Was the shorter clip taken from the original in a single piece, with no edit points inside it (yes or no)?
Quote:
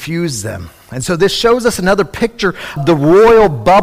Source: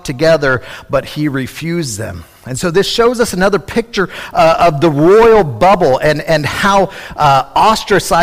no